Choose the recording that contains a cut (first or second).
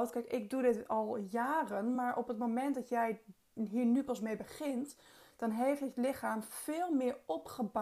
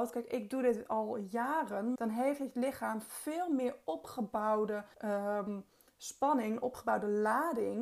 second